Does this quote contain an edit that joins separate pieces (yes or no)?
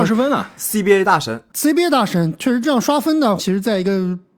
yes